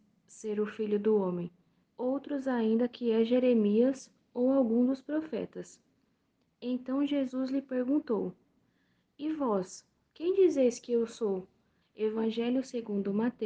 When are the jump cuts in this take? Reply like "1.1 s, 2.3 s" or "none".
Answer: 1.8 s, 11.8 s